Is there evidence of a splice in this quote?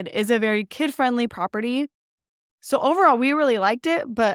no; 0 cuts

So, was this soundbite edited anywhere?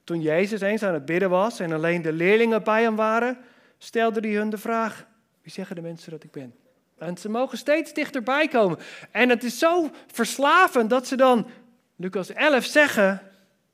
yes; 1 cut; at 7.0 s

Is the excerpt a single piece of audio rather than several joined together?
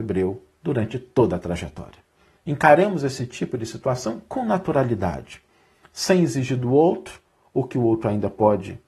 no; 1 cut; at 2.4 s

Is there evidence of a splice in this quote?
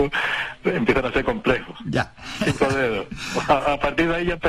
yes; 1 cut; at 2.4 s

